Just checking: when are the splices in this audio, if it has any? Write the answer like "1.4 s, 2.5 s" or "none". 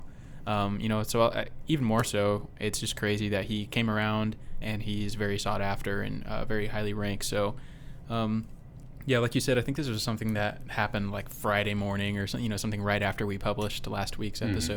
4.6 s